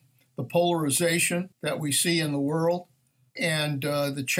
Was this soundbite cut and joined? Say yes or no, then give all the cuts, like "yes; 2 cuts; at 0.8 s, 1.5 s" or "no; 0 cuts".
yes; 1 cut; at 1.5 s